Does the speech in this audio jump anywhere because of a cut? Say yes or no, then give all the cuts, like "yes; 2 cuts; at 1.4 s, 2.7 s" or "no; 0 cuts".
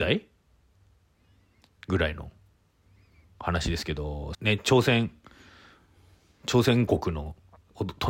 yes; 1 cut; at 4.3 s